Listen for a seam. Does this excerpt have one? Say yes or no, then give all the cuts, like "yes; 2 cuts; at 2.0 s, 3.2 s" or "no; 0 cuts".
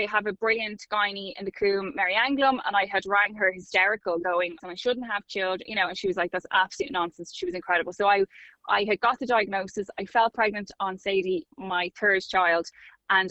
yes; 2 cuts; at 4.6 s, 11.5 s